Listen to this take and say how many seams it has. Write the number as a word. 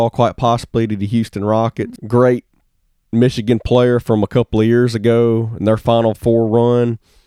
one